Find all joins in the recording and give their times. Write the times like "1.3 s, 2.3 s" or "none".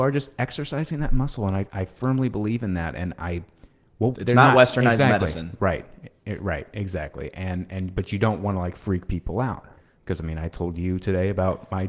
4.1 s